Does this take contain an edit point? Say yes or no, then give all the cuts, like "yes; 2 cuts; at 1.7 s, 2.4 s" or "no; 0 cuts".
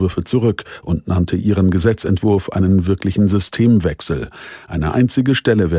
no; 0 cuts